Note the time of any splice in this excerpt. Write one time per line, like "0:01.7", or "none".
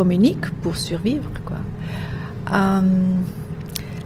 none